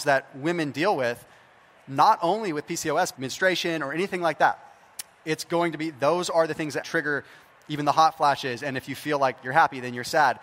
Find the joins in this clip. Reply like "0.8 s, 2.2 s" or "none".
3.1 s, 6.8 s